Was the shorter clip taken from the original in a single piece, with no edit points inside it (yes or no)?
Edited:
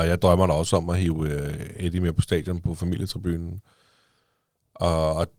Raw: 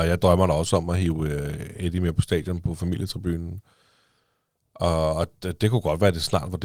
yes